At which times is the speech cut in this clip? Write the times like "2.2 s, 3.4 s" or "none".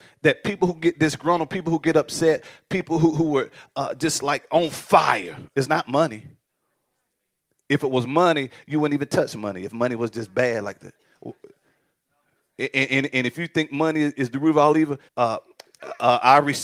5.5 s, 15.1 s

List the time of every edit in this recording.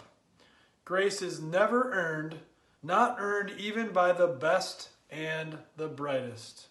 2.8 s

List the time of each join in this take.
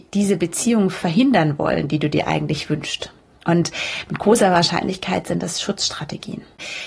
none

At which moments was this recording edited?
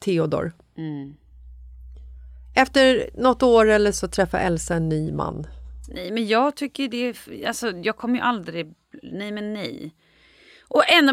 3.9 s

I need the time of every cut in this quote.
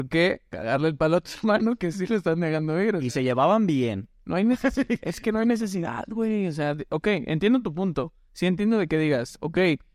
none

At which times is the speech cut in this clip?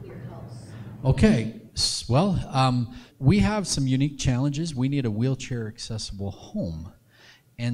3.1 s

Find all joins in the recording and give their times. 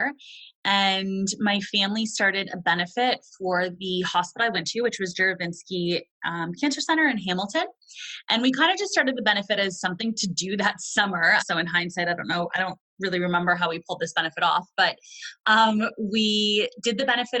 11.4 s

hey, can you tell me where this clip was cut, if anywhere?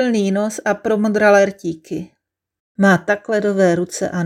2.6 s

